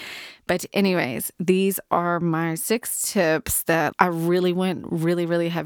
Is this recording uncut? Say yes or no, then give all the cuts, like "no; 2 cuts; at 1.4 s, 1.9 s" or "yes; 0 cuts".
no; 1 cut; at 3.9 s